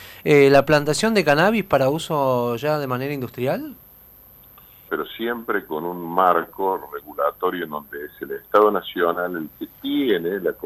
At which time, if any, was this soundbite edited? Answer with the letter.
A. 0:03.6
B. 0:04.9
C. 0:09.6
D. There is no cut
B